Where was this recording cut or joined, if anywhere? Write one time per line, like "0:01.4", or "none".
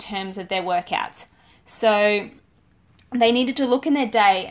none